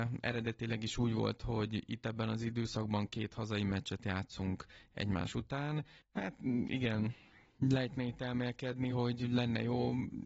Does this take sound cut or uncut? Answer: cut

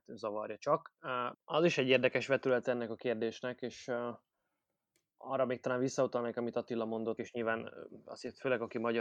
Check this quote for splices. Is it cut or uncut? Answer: cut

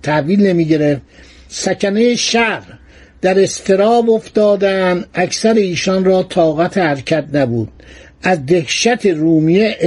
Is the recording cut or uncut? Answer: uncut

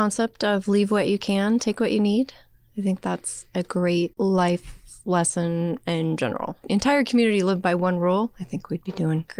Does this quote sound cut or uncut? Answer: cut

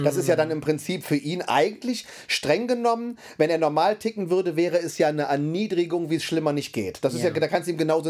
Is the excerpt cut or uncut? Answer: uncut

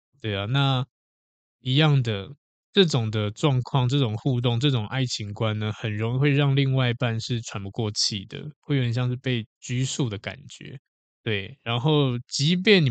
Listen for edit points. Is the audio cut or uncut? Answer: uncut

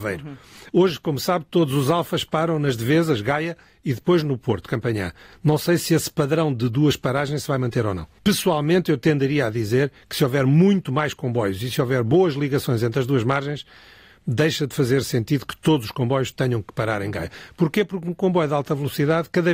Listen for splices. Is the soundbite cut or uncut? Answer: uncut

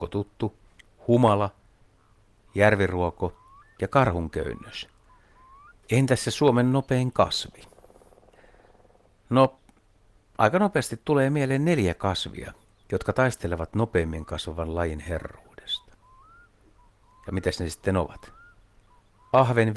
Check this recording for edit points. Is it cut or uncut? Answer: cut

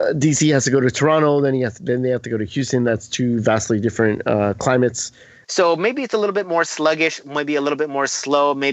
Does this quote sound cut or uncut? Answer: cut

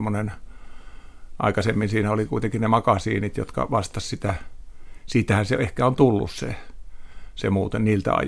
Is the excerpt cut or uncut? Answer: uncut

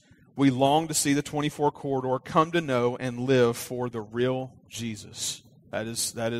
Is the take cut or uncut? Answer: uncut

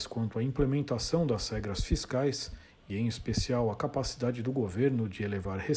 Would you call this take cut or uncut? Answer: uncut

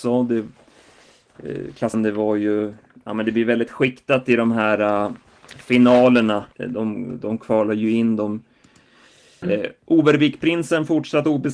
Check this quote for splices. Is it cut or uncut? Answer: cut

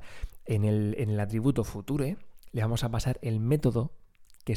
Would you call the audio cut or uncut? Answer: uncut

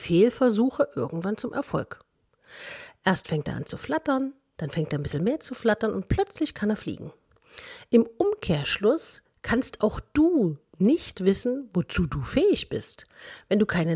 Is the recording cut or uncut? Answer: uncut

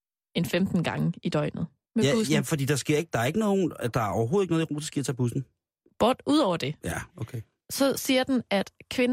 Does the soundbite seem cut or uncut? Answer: cut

